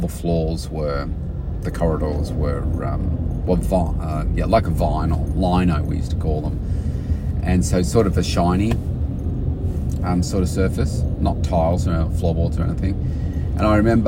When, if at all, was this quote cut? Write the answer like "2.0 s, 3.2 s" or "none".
none